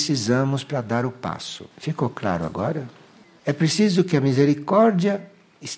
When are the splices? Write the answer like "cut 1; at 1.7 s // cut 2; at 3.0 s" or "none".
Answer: cut 1; at 1.7 s // cut 2; at 3.4 s